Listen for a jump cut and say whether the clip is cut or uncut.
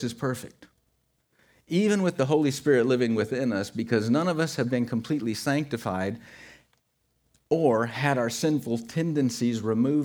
uncut